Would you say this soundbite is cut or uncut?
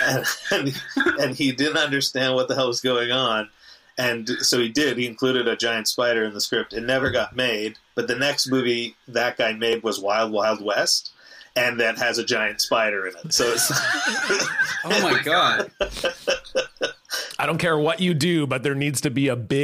uncut